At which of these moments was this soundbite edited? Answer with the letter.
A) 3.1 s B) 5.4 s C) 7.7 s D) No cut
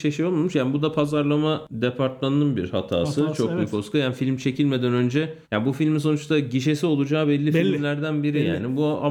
B